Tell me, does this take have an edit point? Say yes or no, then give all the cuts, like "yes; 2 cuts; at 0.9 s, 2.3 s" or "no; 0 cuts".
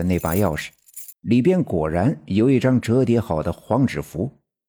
yes; 1 cut; at 1.1 s